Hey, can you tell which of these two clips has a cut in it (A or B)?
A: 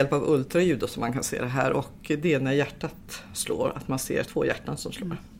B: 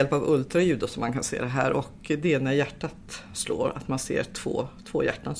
A